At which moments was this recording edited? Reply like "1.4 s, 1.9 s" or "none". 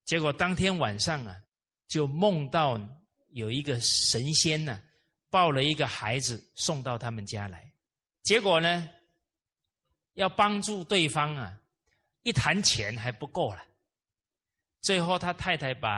8.1 s